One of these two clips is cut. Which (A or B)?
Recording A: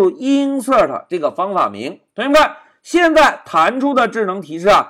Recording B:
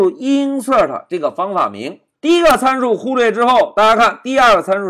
B